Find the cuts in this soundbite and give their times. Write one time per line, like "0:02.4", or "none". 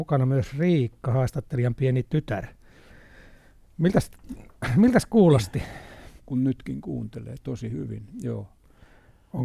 0:06.2